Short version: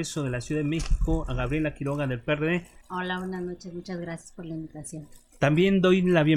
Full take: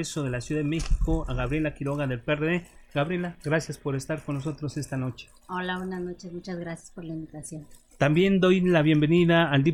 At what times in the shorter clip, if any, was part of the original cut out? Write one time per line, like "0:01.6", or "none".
0:02.8